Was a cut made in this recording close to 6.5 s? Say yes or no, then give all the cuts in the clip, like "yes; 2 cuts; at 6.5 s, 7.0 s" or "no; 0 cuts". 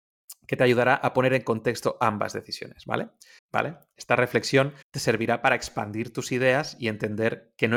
no; 2 cuts; at 3.4 s, 4.8 s